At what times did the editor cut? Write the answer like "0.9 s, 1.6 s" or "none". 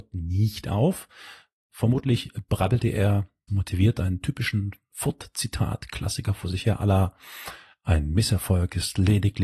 3.5 s